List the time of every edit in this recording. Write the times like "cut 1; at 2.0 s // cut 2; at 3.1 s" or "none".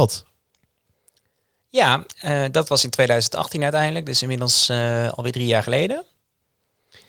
none